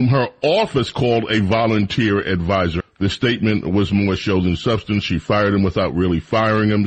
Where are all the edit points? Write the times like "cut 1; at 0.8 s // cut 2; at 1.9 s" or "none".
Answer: cut 1; at 2.8 s